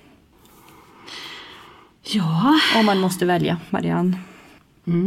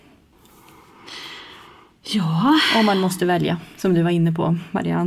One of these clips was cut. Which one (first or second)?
first